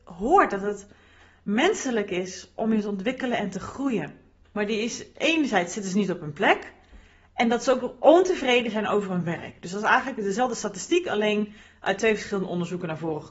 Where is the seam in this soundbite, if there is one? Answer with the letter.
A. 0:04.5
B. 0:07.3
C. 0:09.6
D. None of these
A